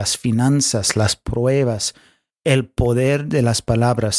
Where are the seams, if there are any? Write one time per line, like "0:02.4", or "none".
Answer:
none

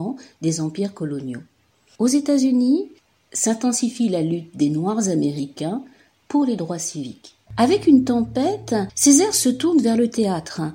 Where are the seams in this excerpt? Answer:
0:07.5

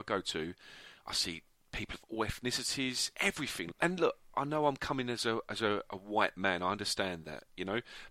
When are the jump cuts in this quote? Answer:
0:03.7

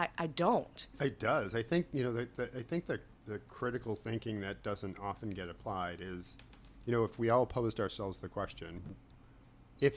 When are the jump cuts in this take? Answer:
0:00.9
0:03.2

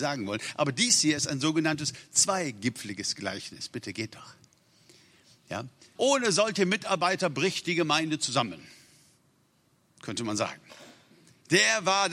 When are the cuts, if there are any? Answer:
0:06.0

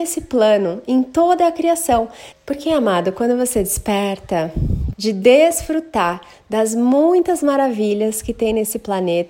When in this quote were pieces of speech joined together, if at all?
0:02.3
0:04.9

